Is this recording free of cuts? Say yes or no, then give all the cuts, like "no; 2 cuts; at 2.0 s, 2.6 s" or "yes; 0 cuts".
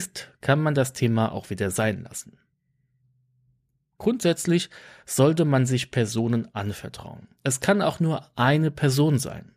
no; 1 cut; at 7.4 s